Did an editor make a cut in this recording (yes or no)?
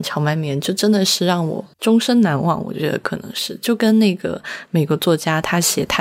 yes